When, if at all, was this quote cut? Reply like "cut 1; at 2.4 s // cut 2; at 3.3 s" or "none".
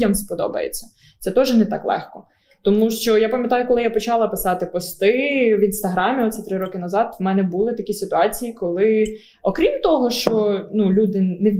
none